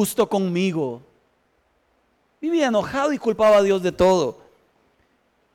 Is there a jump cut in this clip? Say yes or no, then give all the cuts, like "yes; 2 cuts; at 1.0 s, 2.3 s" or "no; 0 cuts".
no; 0 cuts